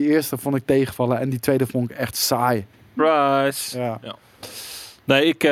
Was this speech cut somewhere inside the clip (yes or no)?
yes